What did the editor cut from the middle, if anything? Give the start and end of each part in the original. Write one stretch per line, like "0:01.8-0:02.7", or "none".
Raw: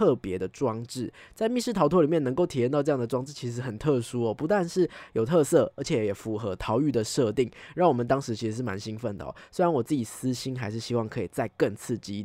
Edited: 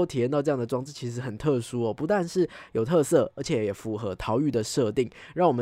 none

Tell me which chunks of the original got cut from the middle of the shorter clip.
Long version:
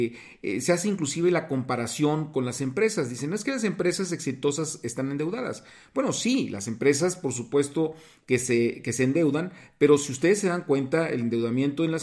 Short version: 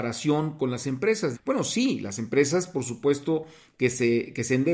0:03.1-0:05.8

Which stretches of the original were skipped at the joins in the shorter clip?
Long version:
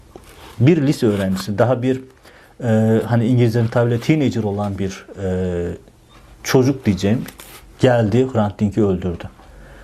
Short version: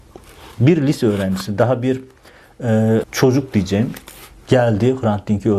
0:03.0-0:06.3

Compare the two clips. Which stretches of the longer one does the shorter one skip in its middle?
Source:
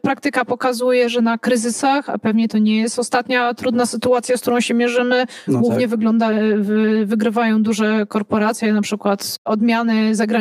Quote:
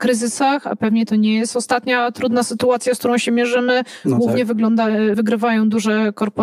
0:06.6-0:07.1

